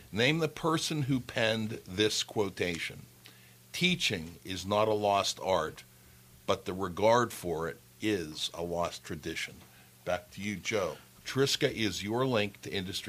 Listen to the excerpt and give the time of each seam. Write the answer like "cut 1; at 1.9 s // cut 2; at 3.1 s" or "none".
cut 1; at 11.2 s